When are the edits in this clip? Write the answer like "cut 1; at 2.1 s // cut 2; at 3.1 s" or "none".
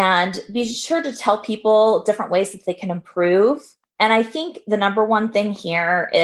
cut 1; at 3.8 s